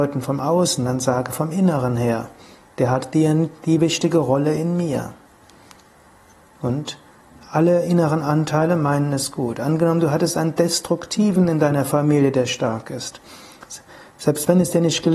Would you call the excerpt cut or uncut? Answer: cut